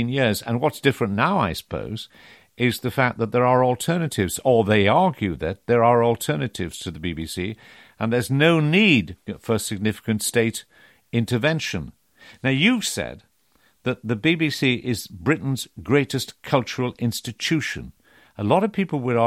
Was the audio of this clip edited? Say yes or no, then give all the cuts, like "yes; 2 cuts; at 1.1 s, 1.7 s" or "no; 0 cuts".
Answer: no; 0 cuts